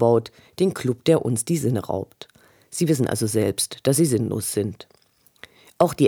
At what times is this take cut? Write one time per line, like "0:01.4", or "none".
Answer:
none